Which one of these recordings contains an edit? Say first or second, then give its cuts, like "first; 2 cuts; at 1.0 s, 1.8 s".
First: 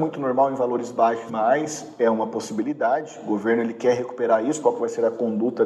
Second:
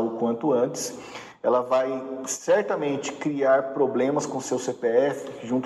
first; 2 cuts; at 1.3 s, 4.6 s